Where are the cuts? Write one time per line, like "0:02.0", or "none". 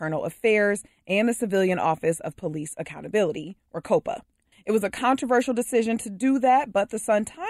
0:04.5

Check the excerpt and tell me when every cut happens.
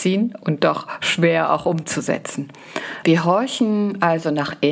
0:03.0

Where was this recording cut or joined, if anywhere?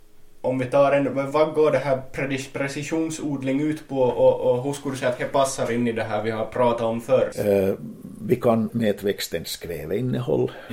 0:01.3
0:07.3
0:08.7

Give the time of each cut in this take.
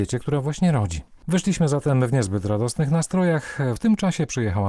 0:03.8

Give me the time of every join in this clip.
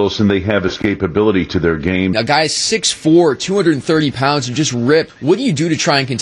0:02.1
0:05.1

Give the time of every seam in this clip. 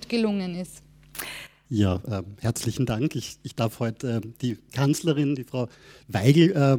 0:01.7

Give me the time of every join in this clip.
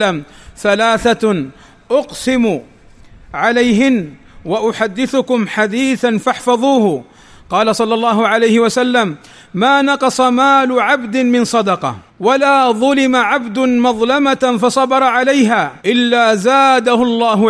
0:12.1
0:15.8

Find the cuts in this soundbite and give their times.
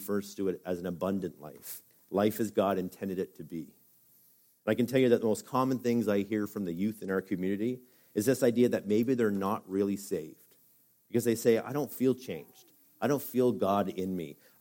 none

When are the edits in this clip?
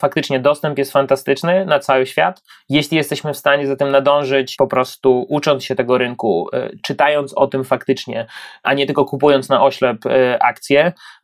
none

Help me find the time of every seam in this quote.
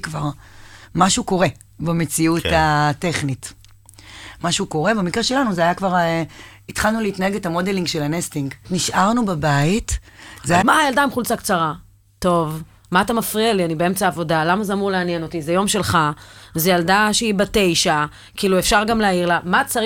0:08.6
0:10.6

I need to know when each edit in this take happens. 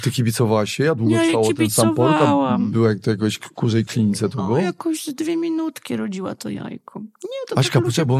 none

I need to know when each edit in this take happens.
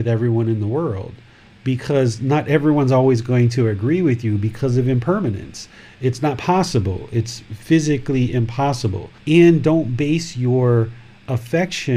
0:09.2

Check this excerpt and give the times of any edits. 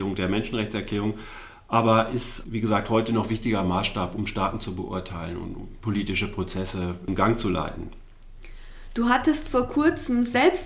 none

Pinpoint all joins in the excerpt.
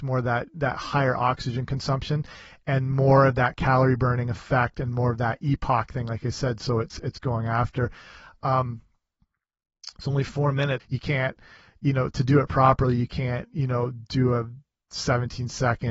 0:10.8

